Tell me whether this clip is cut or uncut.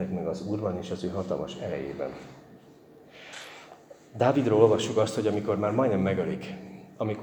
uncut